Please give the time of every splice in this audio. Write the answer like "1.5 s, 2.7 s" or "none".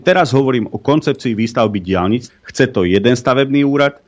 2.3 s